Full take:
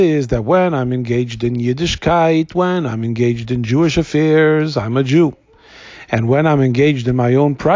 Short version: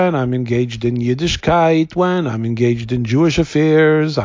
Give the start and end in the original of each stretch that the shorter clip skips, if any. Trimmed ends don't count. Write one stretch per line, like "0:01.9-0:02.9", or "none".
none